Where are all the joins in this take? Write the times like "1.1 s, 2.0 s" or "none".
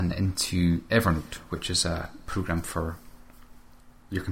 none